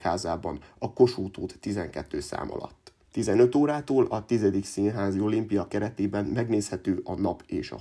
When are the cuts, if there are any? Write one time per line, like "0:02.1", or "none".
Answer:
none